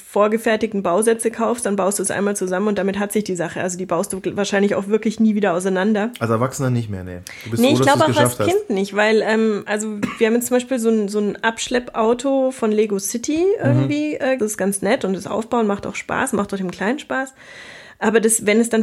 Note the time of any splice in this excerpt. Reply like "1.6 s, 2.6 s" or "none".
14.4 s